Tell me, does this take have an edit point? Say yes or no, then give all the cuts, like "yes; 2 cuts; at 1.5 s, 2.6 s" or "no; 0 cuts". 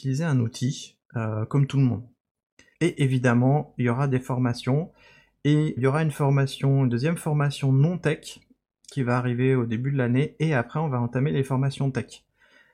yes; 2 cuts; at 2.7 s, 5.8 s